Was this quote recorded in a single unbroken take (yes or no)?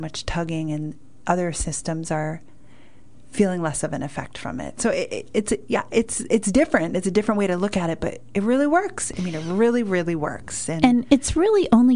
yes